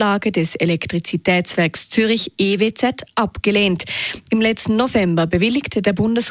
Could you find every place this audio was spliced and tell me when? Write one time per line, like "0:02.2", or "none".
0:04.3